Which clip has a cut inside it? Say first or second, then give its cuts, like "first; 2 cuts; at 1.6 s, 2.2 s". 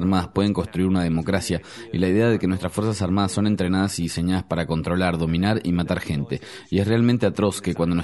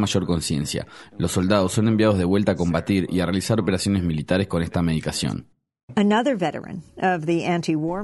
second; 1 cut; at 1.1 s